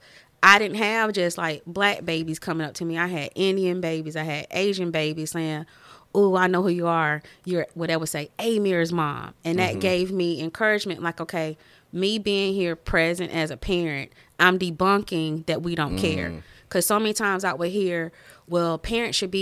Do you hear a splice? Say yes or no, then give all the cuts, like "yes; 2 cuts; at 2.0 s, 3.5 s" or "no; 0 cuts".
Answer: no; 0 cuts